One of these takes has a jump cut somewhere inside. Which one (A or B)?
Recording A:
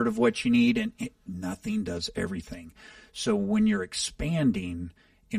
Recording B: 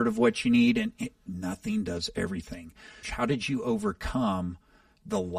B